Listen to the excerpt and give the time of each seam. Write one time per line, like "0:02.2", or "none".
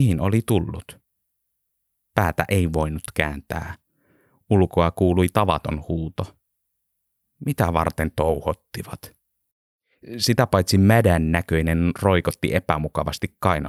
none